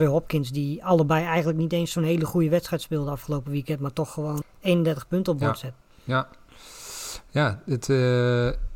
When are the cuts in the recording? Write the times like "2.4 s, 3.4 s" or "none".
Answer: 4.4 s

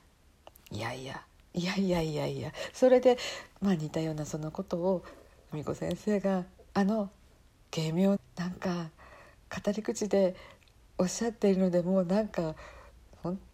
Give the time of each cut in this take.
8.2 s

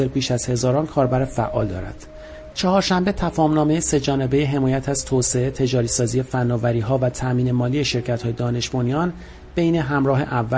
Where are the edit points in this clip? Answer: 2.5 s

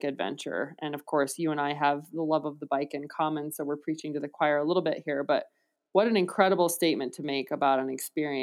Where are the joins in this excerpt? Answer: none

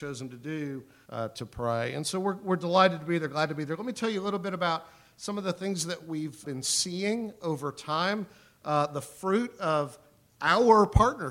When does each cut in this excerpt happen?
1.1 s, 6.4 s

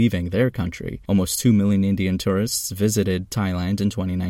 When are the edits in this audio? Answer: 1.0 s

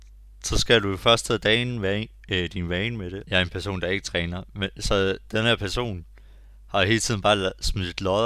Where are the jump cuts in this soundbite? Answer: 3.2 s

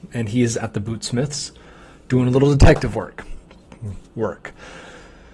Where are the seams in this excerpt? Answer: 4.1 s

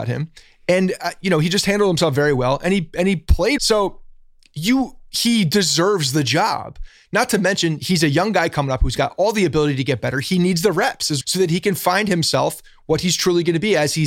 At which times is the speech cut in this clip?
3.6 s, 11.2 s

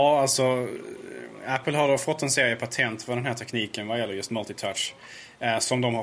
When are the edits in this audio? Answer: none

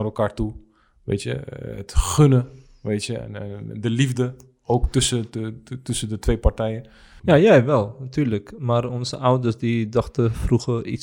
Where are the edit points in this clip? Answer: 3.7 s, 7.2 s

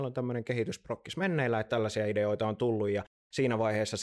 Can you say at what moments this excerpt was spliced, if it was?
1.7 s

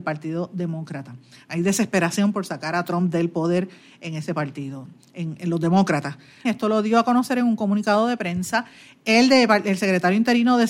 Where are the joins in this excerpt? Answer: 6.4 s

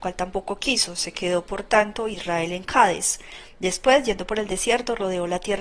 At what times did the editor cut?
none

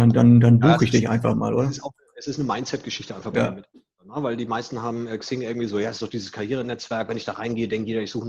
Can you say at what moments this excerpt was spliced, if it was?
none

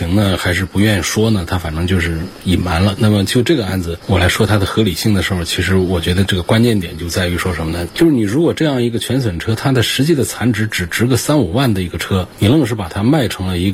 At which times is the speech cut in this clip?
7.9 s

